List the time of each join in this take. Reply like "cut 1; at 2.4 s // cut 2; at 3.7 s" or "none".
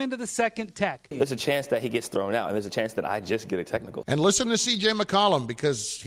cut 1; at 1.1 s // cut 2; at 4.0 s